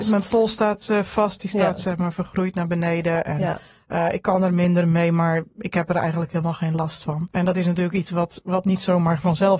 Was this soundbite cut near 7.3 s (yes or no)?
yes